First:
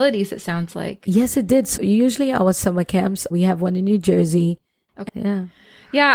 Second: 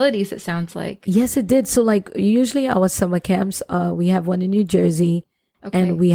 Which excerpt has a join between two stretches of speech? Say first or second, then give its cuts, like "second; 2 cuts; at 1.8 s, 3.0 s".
first; 3 cuts; at 1.8 s, 3.3 s, 5.1 s